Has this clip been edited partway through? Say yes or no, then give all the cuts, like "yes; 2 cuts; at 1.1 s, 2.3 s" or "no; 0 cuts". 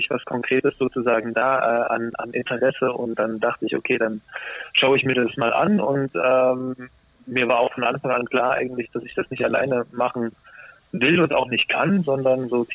no; 0 cuts